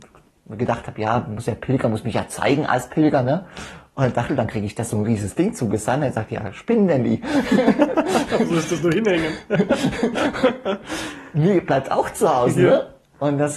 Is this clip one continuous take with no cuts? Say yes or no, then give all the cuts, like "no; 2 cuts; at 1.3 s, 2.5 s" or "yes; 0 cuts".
no; 1 cut; at 4.3 s